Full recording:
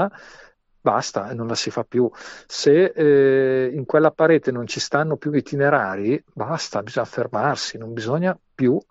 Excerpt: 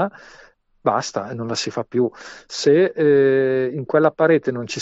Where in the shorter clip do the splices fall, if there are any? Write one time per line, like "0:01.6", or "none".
none